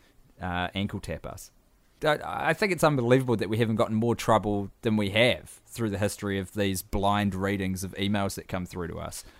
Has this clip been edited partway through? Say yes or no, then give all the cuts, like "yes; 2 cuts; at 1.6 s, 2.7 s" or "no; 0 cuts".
yes; 2 cuts; at 2.0 s, 4.8 s